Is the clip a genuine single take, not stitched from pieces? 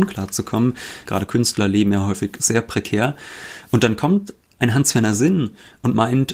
no; 1 cut; at 1.1 s

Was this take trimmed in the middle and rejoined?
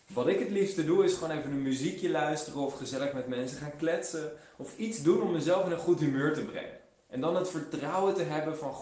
no; 0 cuts

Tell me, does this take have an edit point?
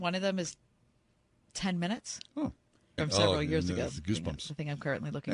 yes; 1 cut; at 3.0 s

